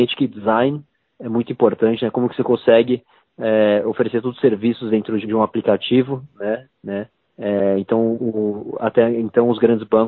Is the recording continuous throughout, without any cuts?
no; 2 cuts; at 5.2 s, 6.7 s

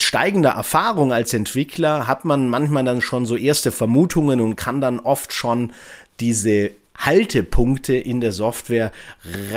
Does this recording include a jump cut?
no; 0 cuts

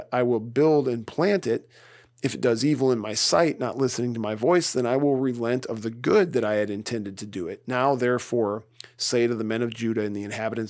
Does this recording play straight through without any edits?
yes; 0 cuts

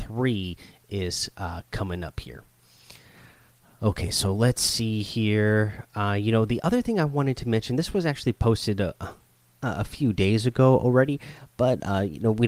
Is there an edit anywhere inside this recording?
no; 0 cuts

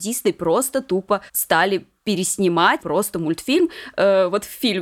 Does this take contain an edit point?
yes; 2 cuts; at 1.3 s, 2.8 s

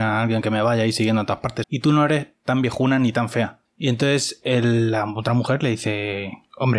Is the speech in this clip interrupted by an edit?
yes; 1 cut; at 1.6 s

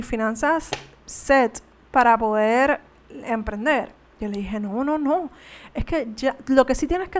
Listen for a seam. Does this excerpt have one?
no; 0 cuts

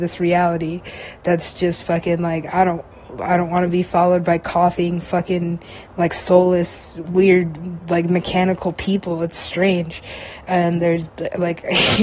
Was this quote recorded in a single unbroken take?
yes; 0 cuts

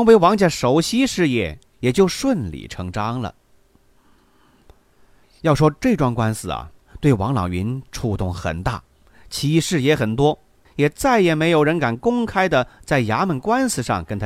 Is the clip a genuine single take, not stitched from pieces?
no; 1 cut; at 10.7 s

